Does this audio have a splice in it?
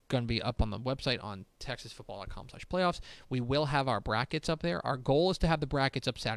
no; 0 cuts

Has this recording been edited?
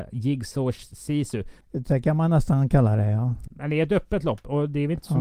yes; 2 cuts; at 1.6 s, 3.5 s

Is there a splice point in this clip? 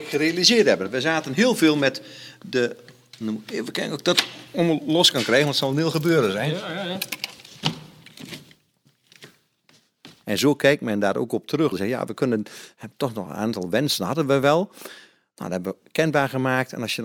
yes; 2 cuts; at 10.2 s, 11.7 s

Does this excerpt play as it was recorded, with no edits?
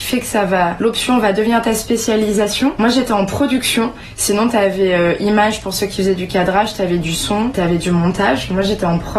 yes; 0 cuts

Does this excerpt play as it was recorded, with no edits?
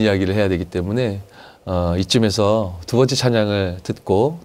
yes; 0 cuts

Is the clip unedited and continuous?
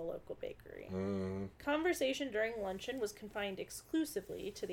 yes; 0 cuts

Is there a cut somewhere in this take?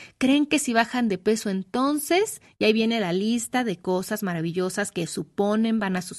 no; 0 cuts

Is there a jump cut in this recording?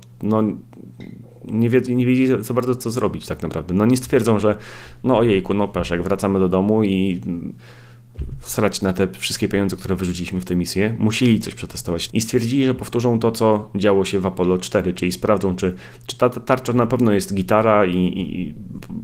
yes; 1 cut; at 12.1 s

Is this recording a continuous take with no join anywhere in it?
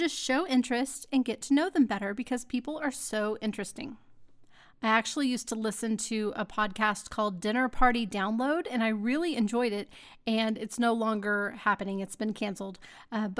yes; 0 cuts

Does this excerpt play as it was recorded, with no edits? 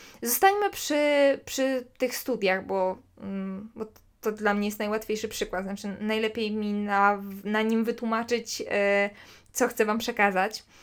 yes; 0 cuts

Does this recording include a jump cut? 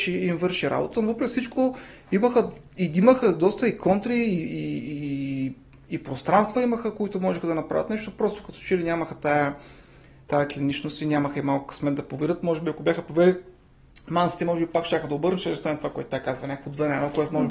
no; 0 cuts

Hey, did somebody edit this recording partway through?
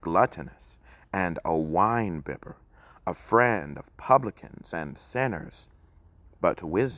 no; 0 cuts

